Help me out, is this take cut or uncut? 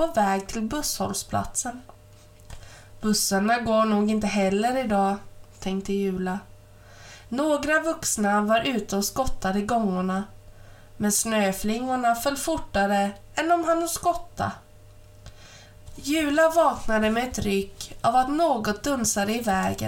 cut